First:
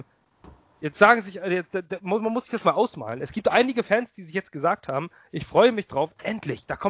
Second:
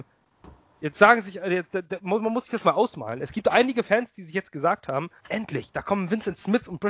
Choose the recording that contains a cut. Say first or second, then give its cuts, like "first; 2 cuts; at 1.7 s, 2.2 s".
second; 1 cut; at 5.2 s